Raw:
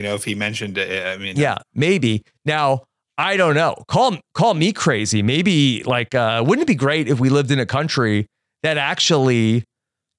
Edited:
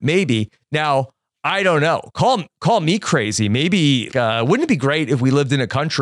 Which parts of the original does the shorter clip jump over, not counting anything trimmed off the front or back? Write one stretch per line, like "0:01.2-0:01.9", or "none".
0:05.8-0:06.1